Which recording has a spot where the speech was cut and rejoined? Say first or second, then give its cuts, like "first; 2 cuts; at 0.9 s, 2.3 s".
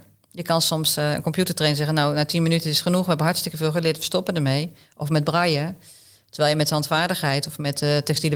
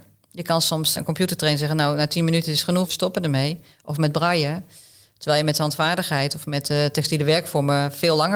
second; 2 cuts; at 1.0 s, 2.8 s